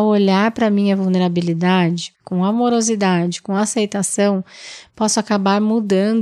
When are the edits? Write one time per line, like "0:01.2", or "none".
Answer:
0:02.1